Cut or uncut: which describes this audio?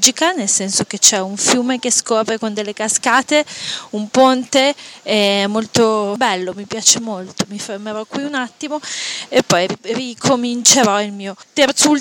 uncut